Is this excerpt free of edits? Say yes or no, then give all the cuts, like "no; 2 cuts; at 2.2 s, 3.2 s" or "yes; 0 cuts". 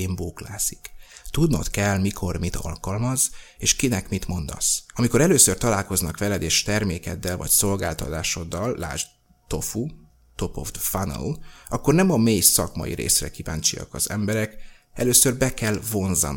yes; 0 cuts